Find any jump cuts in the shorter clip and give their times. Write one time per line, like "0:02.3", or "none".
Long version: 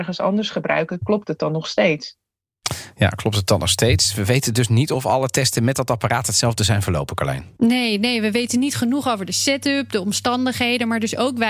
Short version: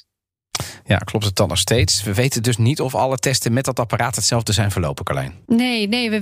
none